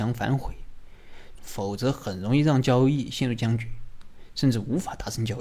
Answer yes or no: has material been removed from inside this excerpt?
yes